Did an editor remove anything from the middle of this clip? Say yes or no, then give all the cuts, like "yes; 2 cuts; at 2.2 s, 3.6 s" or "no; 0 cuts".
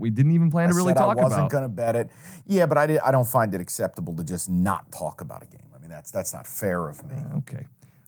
no; 0 cuts